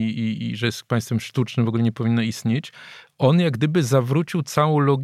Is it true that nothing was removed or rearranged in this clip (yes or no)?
yes